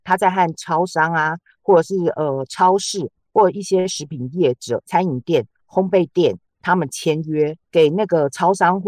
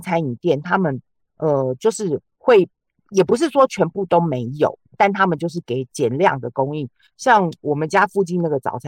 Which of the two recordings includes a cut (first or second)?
first